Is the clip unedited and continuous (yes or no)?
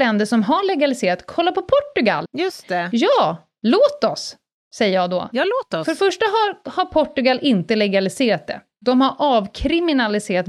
no